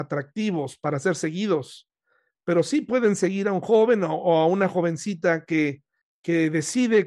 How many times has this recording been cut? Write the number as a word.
one